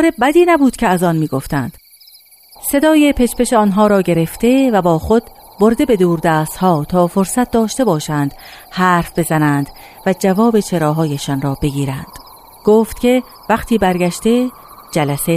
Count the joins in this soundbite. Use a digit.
1